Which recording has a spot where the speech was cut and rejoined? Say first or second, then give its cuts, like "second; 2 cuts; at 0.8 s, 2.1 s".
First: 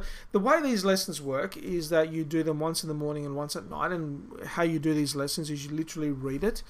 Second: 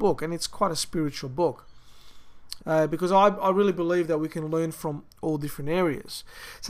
second; 1 cut; at 2.6 s